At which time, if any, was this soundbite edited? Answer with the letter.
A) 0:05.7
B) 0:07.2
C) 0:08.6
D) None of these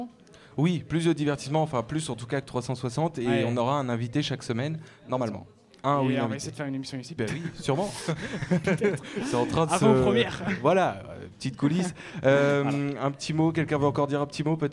B